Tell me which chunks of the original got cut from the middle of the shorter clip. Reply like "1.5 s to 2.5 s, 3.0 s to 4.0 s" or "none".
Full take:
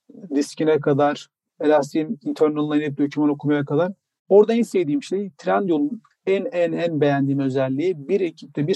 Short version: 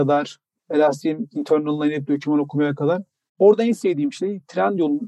none